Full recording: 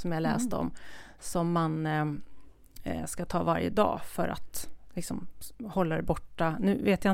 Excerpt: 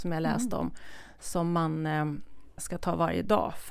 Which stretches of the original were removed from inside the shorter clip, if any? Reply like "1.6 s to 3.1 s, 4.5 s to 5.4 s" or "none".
2.6 s to 3.1 s